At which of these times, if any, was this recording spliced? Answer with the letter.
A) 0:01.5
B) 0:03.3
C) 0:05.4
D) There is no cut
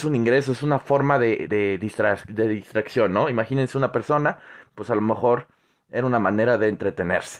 D